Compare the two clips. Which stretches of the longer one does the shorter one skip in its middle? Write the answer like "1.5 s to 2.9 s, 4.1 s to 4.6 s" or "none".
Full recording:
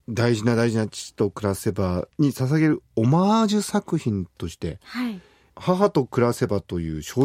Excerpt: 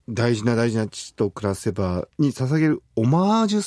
none